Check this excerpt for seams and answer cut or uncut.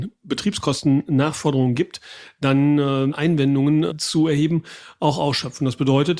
cut